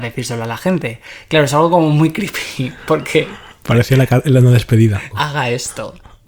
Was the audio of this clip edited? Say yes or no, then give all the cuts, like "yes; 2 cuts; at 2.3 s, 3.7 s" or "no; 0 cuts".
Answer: yes; 1 cut; at 5.1 s